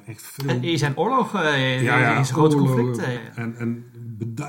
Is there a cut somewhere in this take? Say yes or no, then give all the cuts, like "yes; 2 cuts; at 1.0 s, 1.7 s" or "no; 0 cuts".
yes; 1 cut; at 3.2 s